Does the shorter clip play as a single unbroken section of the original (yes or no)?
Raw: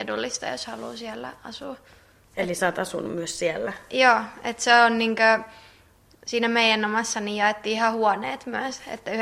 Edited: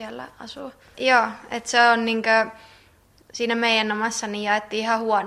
no